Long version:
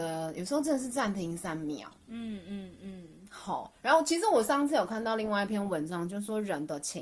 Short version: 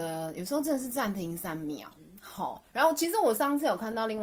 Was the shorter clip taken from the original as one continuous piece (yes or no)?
no